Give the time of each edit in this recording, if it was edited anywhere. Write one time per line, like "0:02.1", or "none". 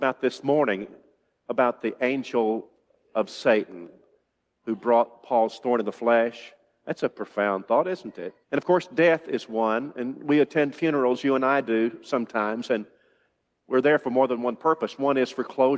0:08.4